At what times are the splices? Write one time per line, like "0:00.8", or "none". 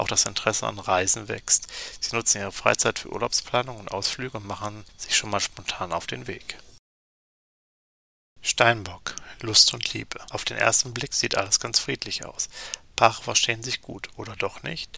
none